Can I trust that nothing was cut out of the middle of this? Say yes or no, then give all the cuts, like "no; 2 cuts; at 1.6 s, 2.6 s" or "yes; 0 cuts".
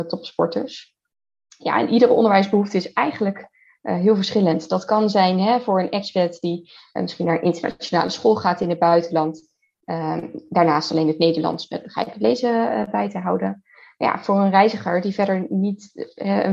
yes; 0 cuts